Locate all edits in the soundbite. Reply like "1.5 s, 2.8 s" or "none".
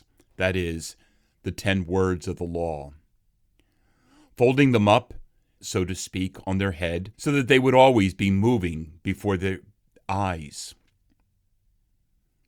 5.6 s, 7.1 s